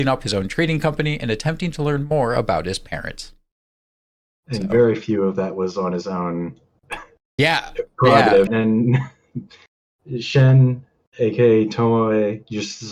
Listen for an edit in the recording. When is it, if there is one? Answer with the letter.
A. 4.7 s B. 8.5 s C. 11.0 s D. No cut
B